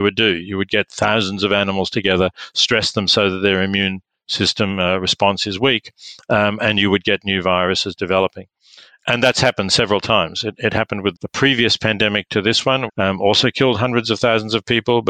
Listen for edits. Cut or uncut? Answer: cut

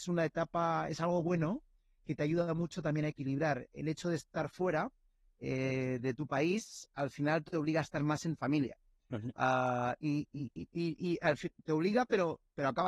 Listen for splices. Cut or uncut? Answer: uncut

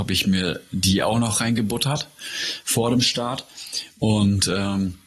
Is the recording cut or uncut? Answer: uncut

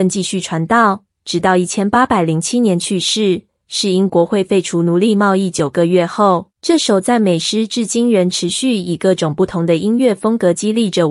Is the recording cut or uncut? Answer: cut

